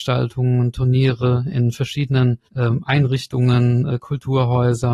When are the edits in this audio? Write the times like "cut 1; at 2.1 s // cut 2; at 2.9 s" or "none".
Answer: cut 1; at 2.5 s